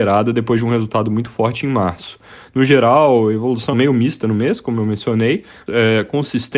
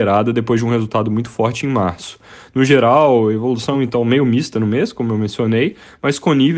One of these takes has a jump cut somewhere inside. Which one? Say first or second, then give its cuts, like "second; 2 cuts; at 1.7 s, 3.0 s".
first; 2 cuts; at 3.7 s, 5.7 s